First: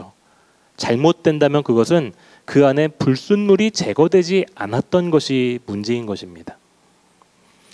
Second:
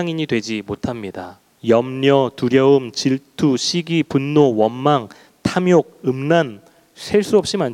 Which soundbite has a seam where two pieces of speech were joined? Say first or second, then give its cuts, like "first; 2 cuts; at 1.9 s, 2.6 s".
second; 1 cut; at 1.6 s